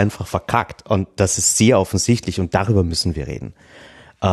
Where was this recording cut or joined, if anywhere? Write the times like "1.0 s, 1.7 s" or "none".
none

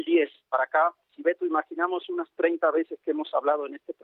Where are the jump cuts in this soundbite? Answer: 1.0 s

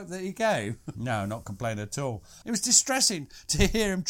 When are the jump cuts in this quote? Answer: 0.9 s, 2.4 s

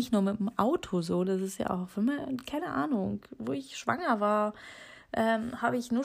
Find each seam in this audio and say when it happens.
none

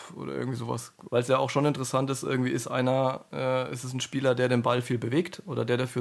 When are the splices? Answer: 1.1 s

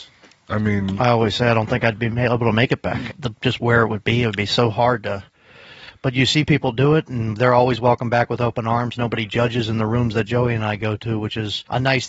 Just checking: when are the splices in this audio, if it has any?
3.1 s

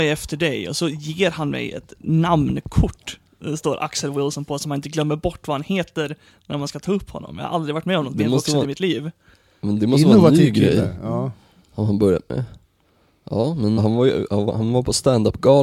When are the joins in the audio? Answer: 13.8 s

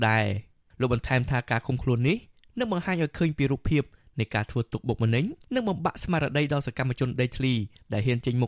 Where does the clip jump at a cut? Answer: 5.4 s

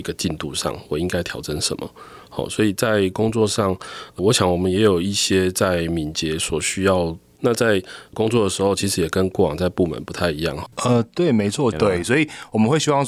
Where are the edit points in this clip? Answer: 7.4 s, 10.7 s, 11.7 s

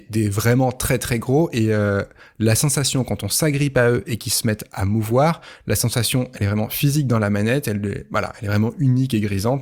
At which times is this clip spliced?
none

